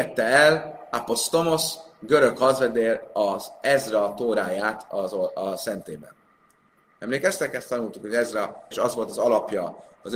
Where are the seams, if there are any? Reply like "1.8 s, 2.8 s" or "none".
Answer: 8.7 s